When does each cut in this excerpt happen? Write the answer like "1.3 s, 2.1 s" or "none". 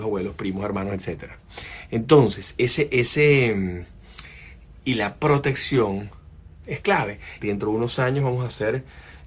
2.6 s, 4.8 s, 7.4 s

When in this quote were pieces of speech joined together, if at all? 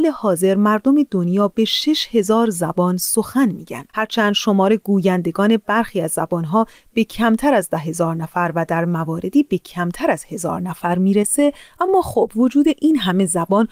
3.9 s

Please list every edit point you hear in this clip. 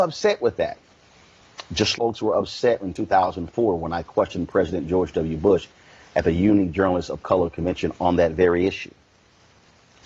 2.0 s

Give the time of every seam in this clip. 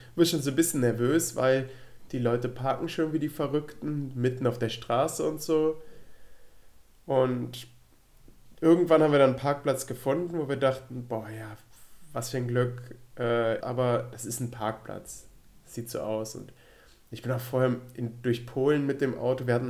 13.6 s

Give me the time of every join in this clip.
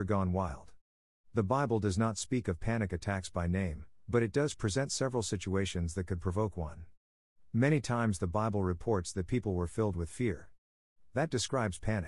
1.2 s

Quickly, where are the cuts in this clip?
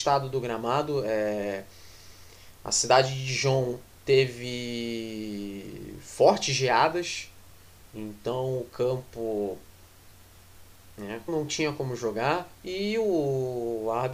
11.3 s, 12.5 s

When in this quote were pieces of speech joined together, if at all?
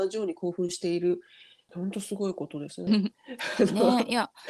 1.7 s, 2.9 s

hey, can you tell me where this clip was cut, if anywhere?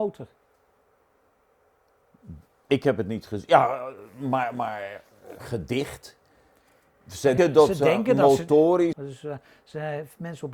7.4 s, 8.9 s

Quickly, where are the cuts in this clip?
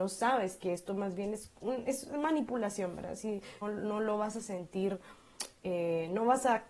3.6 s

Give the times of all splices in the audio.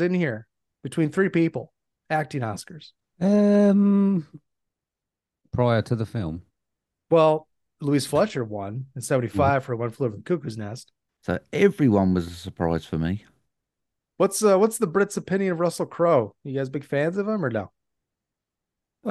11.1 s

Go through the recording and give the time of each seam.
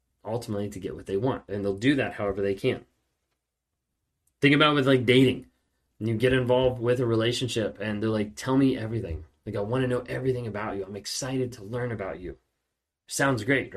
none

